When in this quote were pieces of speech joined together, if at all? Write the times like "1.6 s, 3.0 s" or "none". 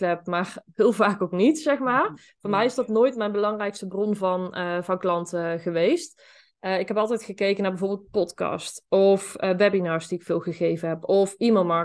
none